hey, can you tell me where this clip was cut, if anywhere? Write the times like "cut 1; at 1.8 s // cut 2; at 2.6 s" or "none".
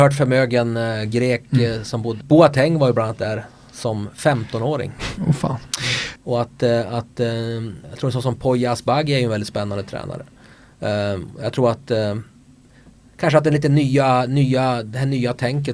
cut 1; at 2.2 s // cut 2; at 6.2 s // cut 3; at 7.8 s

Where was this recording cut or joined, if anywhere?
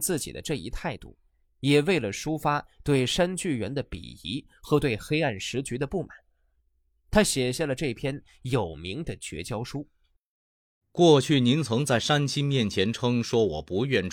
cut 1; at 10.8 s

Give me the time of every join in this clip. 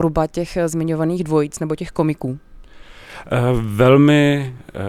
none

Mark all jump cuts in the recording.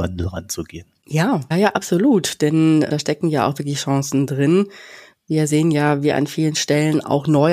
cut 1; at 1.5 s

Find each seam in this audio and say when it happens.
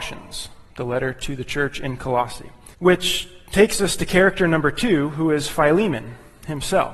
cut 1; at 2.7 s

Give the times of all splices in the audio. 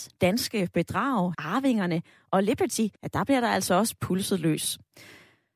cut 1; at 1.3 s // cut 2; at 3.0 s

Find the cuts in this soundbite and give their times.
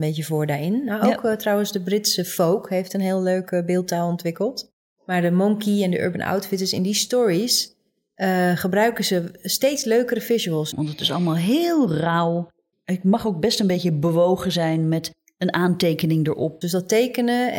cut 1; at 10.7 s // cut 2; at 12.7 s // cut 3; at 16.6 s

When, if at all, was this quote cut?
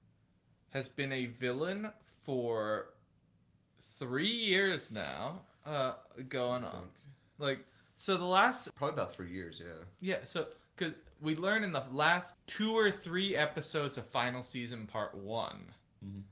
cut 1; at 8.7 s // cut 2; at 12.3 s

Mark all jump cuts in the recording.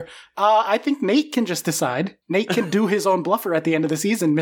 cut 1; at 2.2 s

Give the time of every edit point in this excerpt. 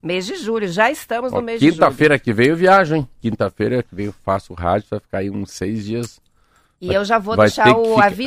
none

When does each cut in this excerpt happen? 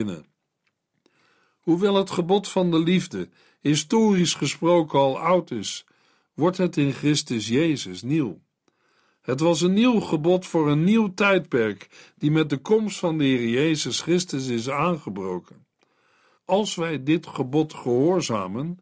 cut 1; at 16.4 s

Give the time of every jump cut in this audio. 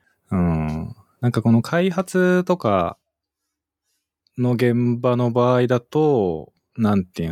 none

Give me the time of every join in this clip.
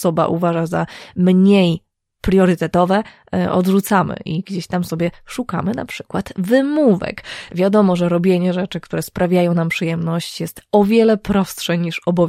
cut 1; at 7.5 s

